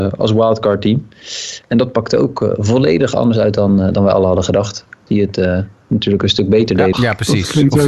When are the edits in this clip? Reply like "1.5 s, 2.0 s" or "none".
5.1 s, 6.9 s